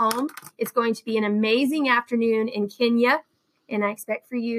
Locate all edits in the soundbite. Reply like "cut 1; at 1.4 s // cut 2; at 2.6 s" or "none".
none